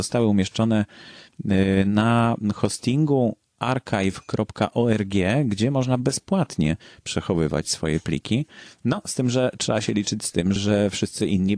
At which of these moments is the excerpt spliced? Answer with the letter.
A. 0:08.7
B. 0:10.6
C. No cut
B